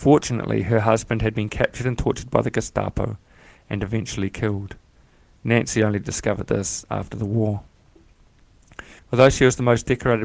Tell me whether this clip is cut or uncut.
cut